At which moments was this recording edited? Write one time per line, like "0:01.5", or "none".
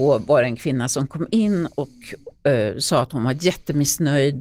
none